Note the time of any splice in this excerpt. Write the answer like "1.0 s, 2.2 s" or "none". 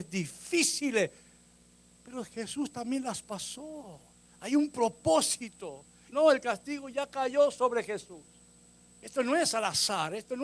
6.1 s, 8.9 s